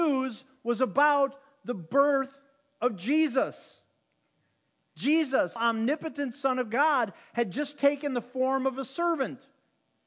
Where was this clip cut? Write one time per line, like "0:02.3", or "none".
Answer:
0:05.6